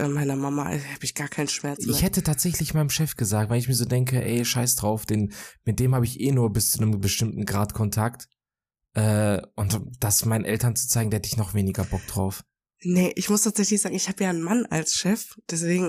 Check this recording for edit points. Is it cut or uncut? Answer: uncut